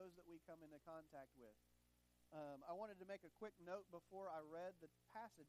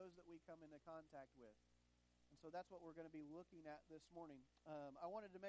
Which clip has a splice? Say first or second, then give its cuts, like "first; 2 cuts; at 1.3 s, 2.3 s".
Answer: first; 1 cut; at 2.3 s